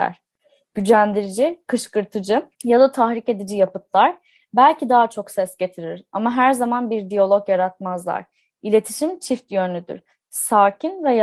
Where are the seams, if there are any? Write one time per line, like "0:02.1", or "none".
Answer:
0:02.5